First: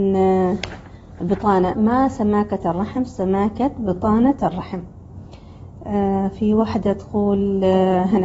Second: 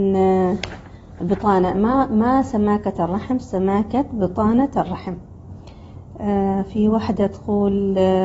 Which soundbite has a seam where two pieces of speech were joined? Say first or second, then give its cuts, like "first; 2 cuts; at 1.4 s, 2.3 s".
first; 1 cut; at 1.7 s